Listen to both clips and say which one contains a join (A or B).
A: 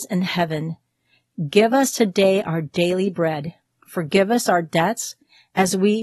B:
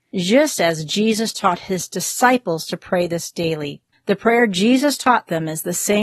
B